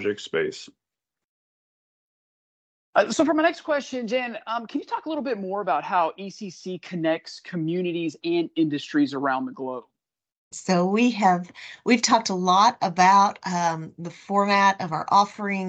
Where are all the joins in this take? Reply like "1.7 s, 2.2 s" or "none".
10.5 s